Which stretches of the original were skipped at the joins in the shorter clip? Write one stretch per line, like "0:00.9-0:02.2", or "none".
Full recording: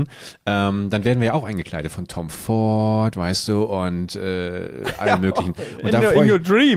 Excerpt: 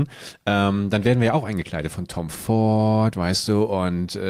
none